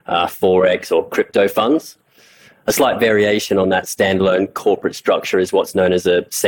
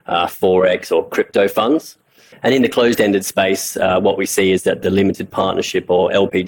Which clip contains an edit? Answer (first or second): second